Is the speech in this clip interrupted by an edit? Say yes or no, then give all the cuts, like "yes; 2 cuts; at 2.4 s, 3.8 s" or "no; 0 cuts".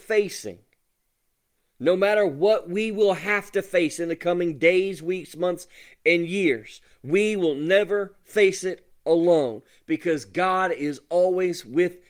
no; 0 cuts